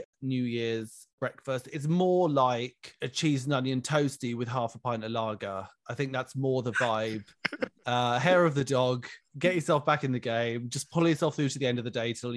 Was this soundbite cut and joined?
no; 0 cuts

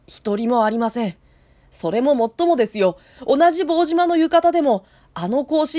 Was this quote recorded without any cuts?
yes; 0 cuts

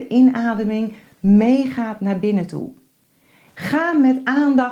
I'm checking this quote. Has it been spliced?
yes; 1 cut; at 3.5 s

